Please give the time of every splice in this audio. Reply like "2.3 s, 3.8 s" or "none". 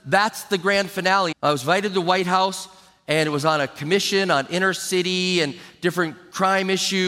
1.3 s